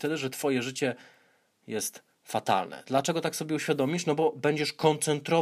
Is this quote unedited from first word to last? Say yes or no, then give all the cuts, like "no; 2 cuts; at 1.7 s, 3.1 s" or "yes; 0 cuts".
yes; 0 cuts